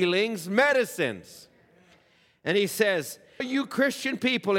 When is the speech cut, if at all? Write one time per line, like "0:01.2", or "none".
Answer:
0:03.4